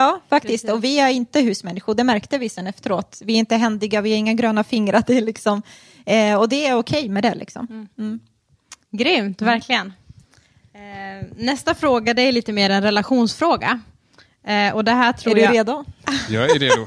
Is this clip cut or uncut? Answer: uncut